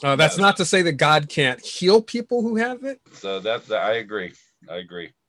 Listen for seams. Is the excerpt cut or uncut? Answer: cut